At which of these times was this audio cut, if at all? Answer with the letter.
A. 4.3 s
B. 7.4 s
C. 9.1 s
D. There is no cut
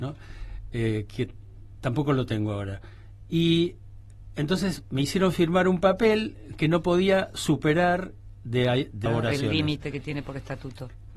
C